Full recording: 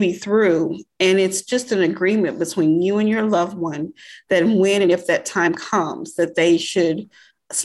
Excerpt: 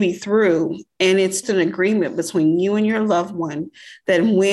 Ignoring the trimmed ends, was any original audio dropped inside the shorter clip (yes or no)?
yes